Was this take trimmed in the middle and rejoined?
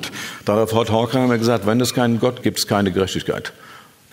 yes; 1 cut; at 2.4 s

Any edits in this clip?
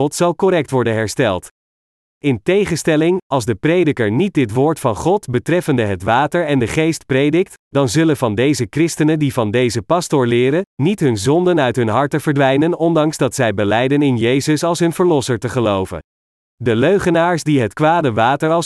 yes; 1 cut; at 16.4 s

